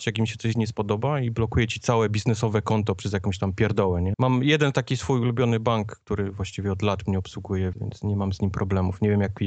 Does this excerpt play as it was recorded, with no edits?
no; 2 cuts; at 4.1 s, 7.7 s

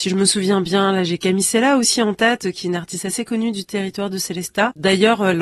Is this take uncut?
yes; 0 cuts

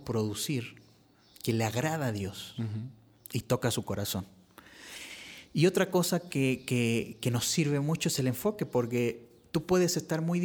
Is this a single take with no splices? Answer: yes; 0 cuts

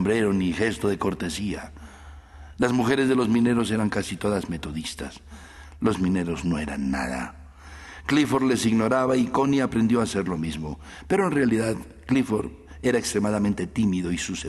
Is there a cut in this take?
yes; 1 cut; at 2.6 s

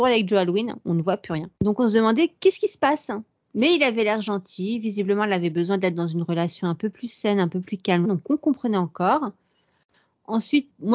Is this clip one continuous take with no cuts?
no; 1 cut; at 8.0 s

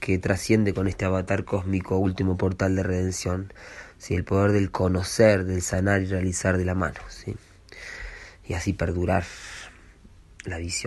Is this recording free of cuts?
yes; 0 cuts

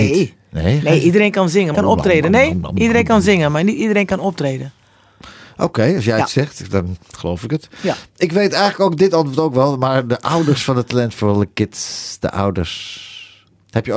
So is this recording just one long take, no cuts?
no; 1 cut; at 1.7 s

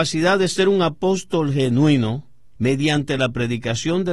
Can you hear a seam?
yes; 1 cut; at 2.5 s

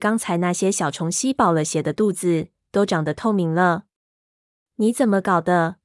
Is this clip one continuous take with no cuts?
yes; 0 cuts

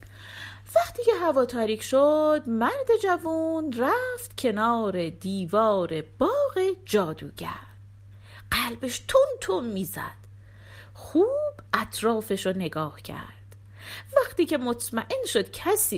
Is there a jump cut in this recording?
no; 0 cuts

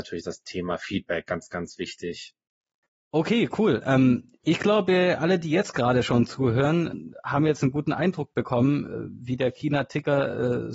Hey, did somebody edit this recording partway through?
no; 0 cuts

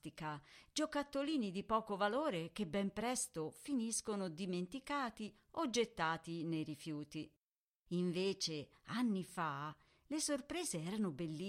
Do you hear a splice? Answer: no; 0 cuts

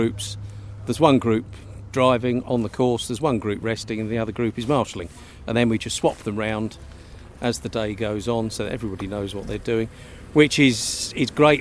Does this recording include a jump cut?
no; 0 cuts

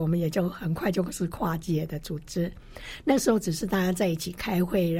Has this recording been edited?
no; 0 cuts

